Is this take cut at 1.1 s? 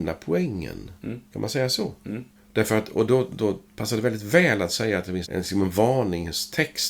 no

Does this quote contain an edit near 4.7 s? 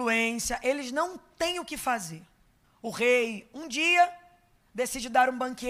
no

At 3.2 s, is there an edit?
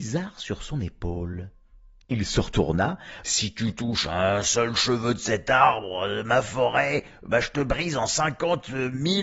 yes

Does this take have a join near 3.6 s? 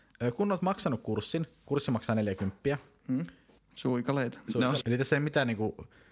yes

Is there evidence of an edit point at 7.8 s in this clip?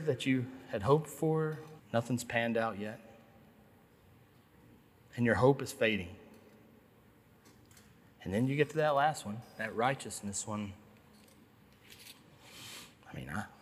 no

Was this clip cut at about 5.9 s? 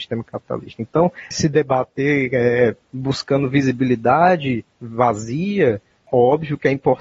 no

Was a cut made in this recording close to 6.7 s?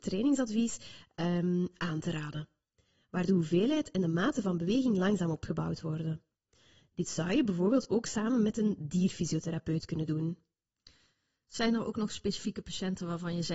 no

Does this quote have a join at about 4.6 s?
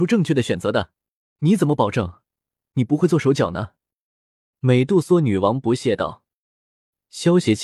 no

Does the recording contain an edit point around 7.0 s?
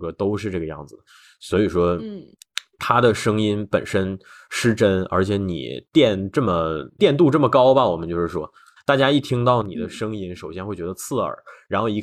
yes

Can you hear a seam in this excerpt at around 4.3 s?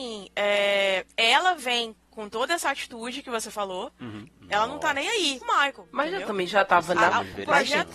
yes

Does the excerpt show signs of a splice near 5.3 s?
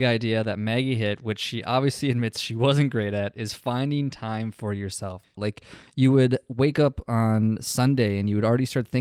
yes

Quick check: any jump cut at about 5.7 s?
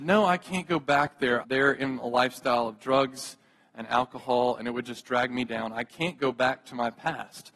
no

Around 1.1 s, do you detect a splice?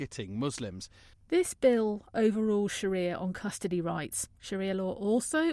yes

